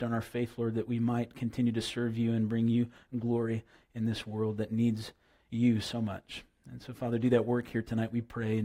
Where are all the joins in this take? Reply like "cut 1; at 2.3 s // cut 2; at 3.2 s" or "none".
none